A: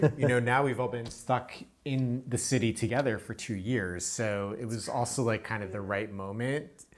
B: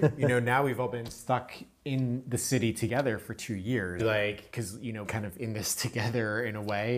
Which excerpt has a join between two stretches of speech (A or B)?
B